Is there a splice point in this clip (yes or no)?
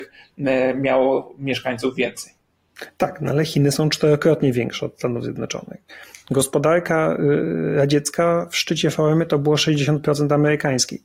no